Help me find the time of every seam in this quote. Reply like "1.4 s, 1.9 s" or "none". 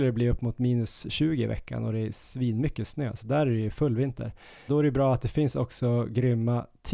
4.7 s